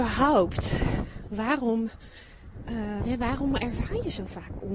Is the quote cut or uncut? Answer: cut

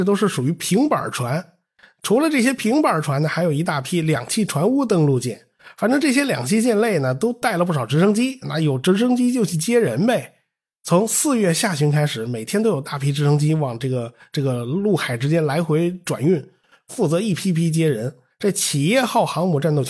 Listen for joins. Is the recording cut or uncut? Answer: cut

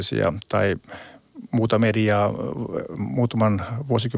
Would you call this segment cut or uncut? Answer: uncut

